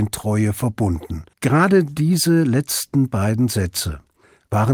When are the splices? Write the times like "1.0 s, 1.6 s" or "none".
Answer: 1.3 s